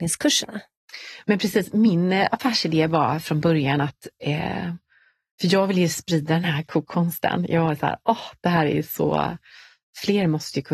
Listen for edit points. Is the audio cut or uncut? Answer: uncut